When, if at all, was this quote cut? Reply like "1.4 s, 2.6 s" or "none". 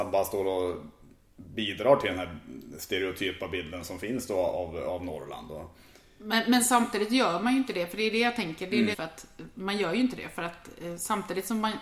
8.9 s